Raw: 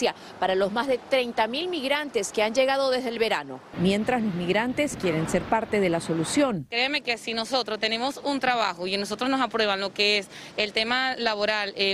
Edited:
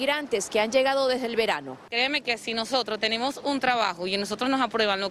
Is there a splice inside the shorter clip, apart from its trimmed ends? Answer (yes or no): yes